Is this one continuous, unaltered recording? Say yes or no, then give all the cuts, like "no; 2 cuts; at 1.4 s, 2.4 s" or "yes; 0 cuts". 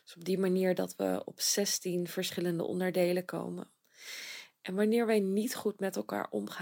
no; 1 cut; at 4.6 s